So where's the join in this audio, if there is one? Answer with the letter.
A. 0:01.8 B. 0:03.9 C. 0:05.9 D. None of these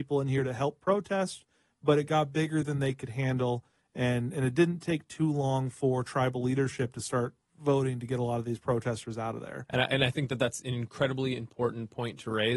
D